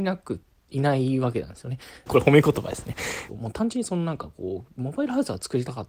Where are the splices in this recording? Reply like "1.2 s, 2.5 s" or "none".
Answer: 2.1 s, 3.3 s